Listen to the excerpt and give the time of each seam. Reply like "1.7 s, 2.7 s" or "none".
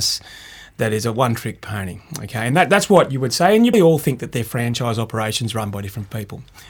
3.7 s